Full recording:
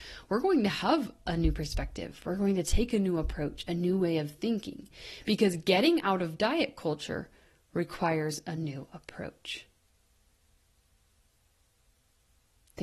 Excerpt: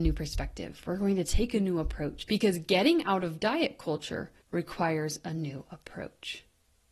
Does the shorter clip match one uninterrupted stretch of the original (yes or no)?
no